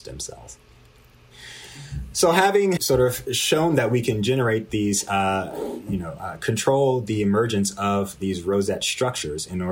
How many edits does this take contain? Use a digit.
1